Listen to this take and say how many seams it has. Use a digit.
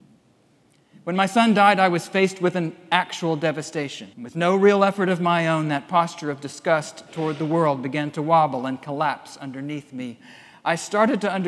1